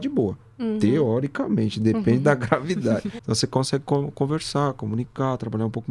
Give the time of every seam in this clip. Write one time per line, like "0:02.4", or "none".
none